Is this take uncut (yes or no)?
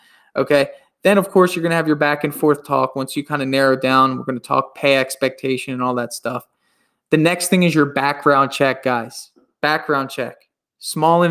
yes